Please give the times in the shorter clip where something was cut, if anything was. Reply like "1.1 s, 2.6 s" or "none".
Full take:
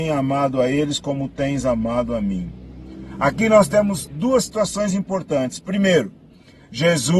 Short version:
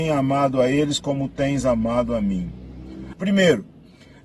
3.1 s